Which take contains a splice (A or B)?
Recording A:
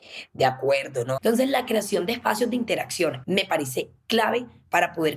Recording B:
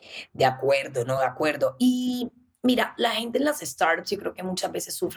A